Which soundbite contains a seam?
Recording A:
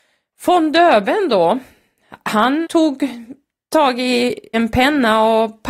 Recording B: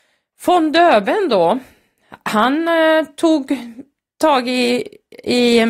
A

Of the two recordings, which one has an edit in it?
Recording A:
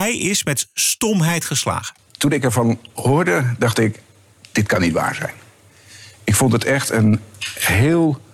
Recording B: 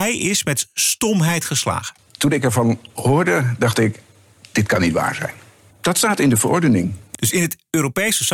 B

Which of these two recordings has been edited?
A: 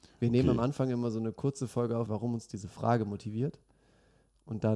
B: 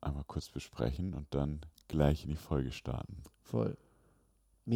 A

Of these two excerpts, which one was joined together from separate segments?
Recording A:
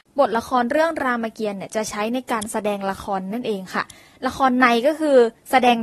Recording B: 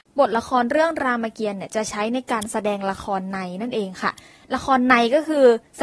A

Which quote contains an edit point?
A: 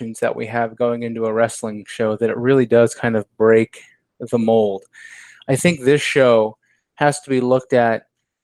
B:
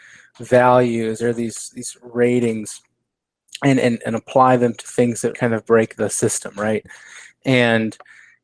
B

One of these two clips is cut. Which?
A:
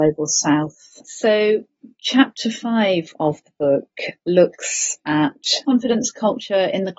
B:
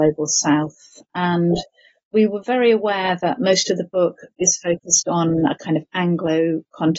A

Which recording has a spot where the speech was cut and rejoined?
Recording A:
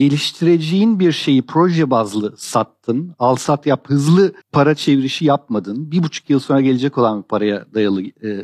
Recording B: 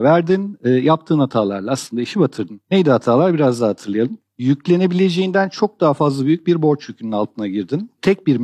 A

